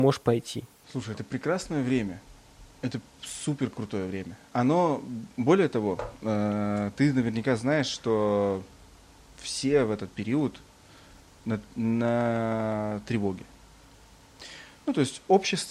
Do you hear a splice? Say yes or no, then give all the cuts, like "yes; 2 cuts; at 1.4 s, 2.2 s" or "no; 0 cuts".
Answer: no; 0 cuts